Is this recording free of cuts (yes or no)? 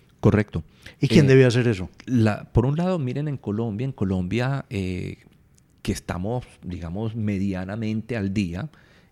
yes